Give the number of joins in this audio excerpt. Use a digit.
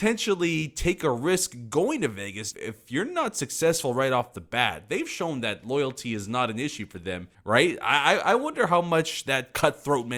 2